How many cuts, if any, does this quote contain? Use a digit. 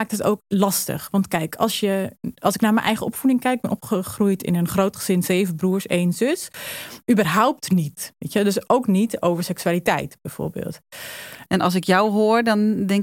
2